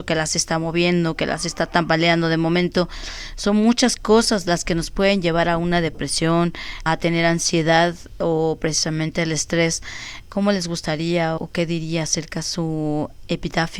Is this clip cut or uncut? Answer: cut